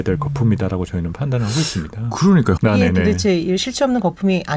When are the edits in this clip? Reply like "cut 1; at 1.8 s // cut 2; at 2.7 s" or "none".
cut 1; at 2.6 s